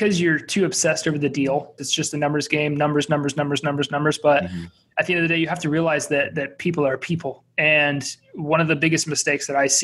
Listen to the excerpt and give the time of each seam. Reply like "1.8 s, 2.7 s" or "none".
1.8 s